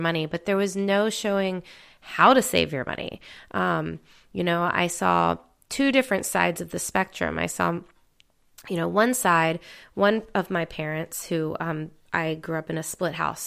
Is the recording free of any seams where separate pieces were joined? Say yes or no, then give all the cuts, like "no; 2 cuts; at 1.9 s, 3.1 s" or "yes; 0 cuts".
yes; 0 cuts